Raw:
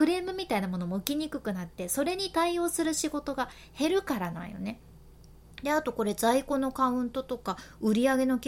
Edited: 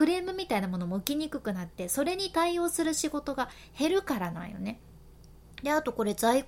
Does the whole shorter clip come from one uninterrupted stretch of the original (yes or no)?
yes